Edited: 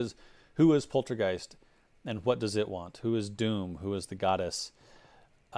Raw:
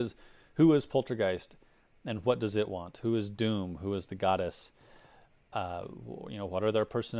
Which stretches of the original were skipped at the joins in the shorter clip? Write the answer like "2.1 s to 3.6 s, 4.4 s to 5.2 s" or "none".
none